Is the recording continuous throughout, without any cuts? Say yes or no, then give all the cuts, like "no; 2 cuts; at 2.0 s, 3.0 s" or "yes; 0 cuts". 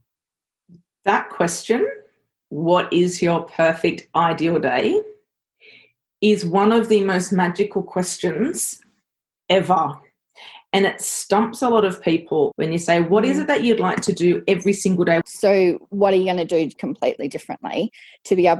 no; 2 cuts; at 12.5 s, 15.2 s